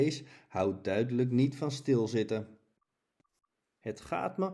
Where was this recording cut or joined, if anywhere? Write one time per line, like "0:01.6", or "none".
0:03.6